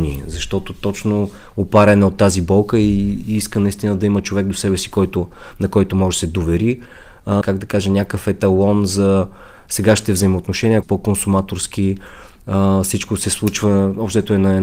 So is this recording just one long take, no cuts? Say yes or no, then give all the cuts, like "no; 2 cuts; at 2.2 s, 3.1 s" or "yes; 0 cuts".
no; 2 cuts; at 7.4 s, 10.8 s